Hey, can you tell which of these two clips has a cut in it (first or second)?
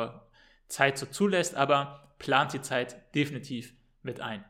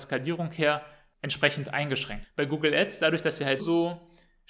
second